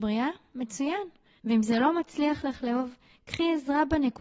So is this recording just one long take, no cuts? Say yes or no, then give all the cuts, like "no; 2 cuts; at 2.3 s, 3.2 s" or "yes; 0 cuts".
no; 1 cut; at 1.4 s